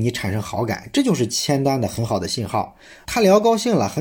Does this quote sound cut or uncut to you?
uncut